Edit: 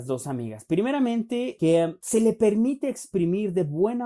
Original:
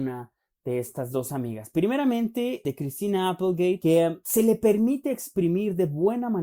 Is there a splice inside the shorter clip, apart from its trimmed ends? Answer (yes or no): yes